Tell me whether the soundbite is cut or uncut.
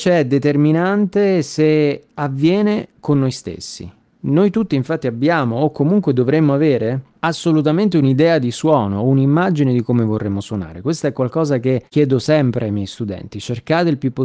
uncut